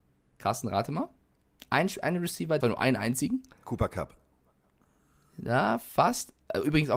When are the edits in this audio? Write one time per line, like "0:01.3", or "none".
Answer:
0:02.6